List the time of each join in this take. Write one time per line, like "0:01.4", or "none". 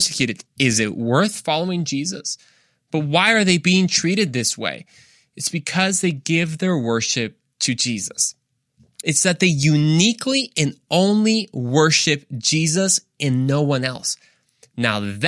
0:09.0